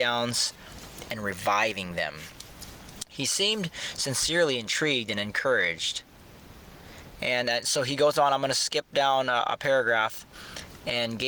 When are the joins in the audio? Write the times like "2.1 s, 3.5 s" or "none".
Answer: none